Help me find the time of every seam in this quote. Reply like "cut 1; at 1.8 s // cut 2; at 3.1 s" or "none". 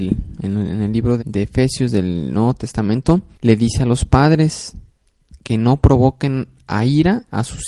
cut 1; at 1.2 s // cut 2; at 3.3 s